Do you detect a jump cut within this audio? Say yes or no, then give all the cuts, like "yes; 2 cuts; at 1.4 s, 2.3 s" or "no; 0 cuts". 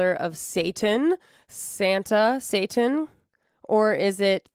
no; 0 cuts